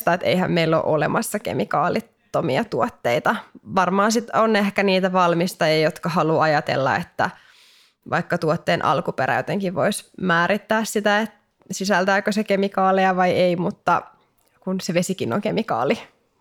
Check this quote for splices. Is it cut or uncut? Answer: uncut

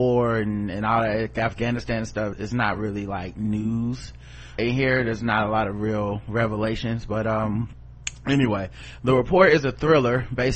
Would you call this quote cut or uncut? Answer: cut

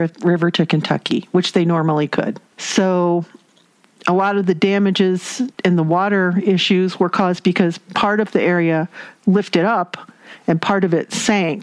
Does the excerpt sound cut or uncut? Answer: cut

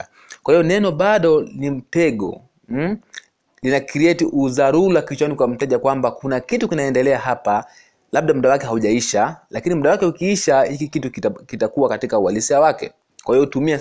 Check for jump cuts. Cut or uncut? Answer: uncut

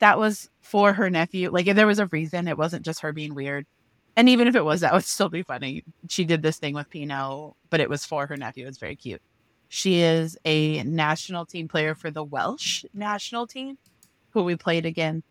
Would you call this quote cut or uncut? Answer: cut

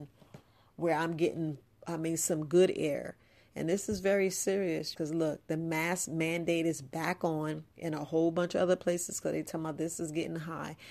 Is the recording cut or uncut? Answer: cut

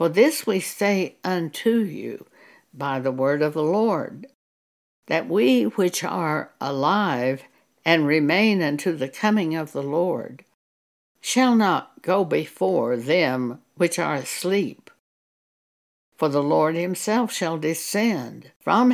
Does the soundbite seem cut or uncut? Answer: uncut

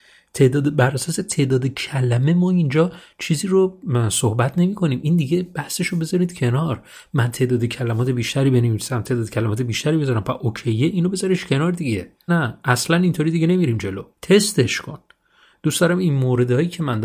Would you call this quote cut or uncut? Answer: cut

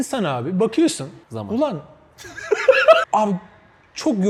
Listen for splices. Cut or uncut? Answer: cut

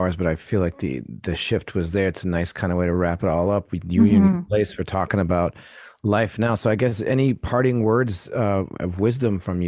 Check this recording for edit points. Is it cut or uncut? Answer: uncut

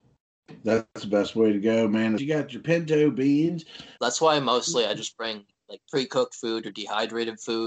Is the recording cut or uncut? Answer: cut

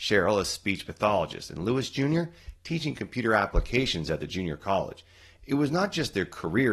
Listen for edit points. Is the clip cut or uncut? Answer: uncut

